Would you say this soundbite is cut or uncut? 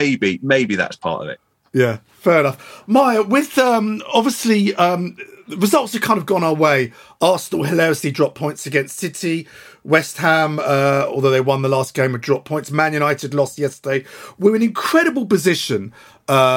uncut